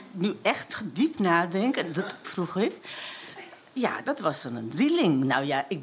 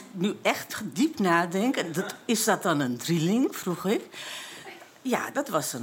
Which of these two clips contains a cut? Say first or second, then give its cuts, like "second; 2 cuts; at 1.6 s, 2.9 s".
first; 1 cut; at 2.2 s